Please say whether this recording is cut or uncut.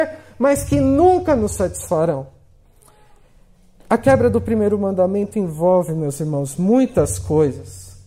uncut